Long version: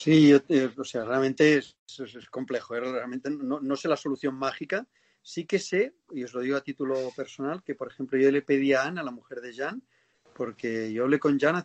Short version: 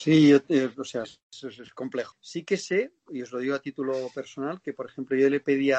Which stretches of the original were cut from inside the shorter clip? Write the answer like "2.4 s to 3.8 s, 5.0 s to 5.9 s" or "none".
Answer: 1.0 s to 1.6 s, 2.7 s to 5.1 s